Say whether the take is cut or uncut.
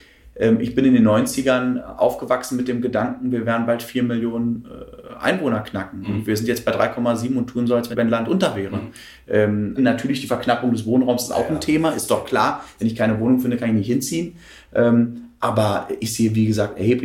cut